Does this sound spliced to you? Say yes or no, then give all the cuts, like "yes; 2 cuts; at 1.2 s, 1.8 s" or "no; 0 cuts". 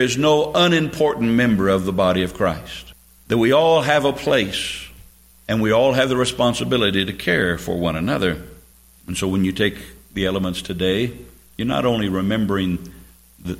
no; 0 cuts